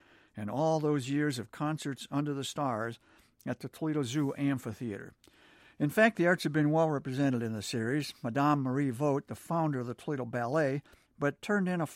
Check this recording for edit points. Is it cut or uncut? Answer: cut